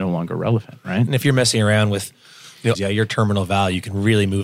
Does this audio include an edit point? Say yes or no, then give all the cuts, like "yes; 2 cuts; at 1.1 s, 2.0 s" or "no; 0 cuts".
yes; 1 cut; at 2.8 s